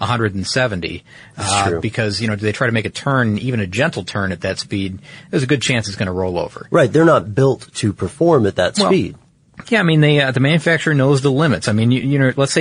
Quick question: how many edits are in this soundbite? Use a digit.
0